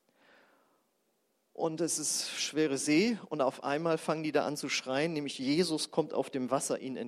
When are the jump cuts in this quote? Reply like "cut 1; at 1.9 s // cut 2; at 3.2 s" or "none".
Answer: none